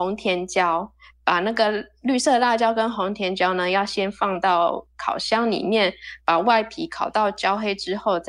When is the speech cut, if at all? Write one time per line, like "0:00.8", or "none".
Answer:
none